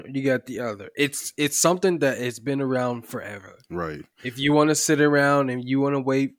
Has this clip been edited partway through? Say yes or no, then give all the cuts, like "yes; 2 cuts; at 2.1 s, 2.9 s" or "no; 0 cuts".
no; 0 cuts